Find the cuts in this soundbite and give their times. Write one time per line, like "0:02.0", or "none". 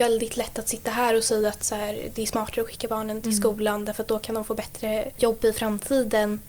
none